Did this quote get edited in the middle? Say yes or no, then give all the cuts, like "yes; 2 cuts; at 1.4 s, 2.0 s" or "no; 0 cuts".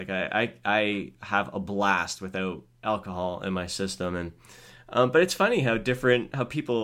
no; 0 cuts